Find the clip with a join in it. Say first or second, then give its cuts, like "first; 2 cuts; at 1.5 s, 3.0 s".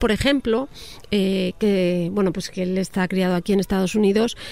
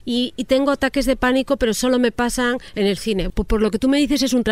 second; 1 cut; at 3.3 s